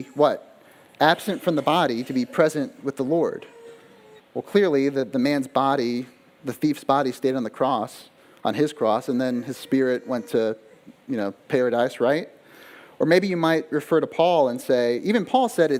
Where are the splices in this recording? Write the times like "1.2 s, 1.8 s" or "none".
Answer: 4.2 s